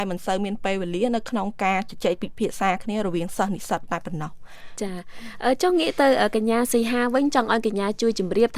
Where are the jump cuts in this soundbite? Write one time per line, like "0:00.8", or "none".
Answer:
none